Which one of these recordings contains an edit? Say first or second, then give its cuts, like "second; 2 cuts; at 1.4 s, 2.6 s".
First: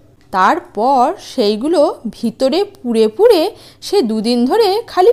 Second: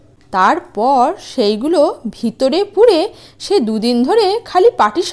second; 1 cut; at 2.7 s